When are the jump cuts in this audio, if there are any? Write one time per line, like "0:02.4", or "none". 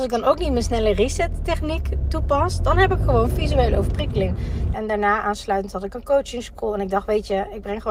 0:04.7